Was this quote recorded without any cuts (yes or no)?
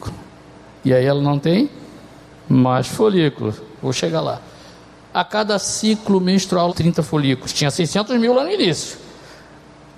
no